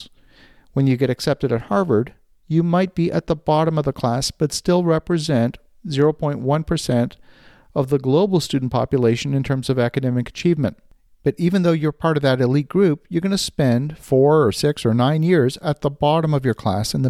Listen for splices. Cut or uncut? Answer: uncut